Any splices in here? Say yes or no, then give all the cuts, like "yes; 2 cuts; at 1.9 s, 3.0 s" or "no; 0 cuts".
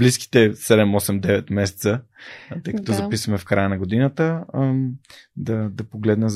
no; 0 cuts